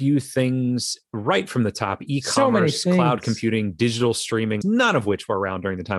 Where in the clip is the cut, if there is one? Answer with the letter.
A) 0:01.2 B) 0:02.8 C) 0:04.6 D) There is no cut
C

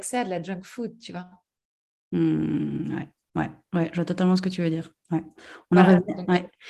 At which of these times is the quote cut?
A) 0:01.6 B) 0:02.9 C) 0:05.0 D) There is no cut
D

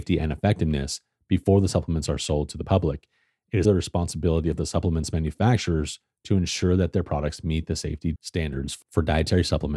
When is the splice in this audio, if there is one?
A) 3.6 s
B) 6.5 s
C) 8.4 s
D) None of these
A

